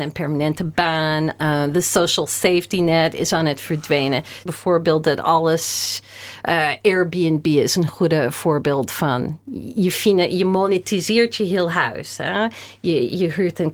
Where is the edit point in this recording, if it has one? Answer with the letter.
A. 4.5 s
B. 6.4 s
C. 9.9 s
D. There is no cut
A